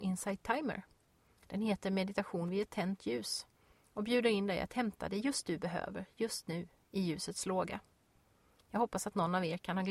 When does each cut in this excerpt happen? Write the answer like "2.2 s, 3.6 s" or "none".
none

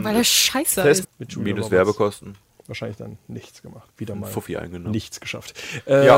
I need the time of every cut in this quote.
1.0 s, 3.9 s

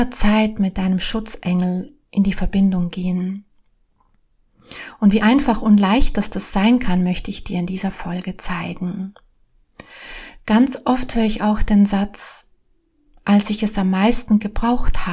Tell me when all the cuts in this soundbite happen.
none

